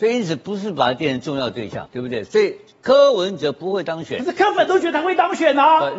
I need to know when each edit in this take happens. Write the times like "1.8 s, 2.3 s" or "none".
1.9 s